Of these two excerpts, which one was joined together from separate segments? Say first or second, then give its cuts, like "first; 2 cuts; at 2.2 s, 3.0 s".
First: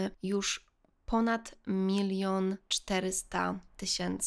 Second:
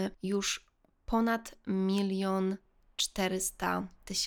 first; 1 cut; at 2.6 s